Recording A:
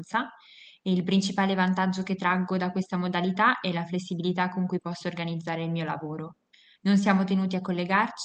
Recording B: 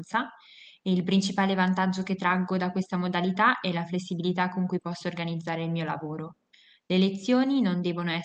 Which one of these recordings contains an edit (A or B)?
A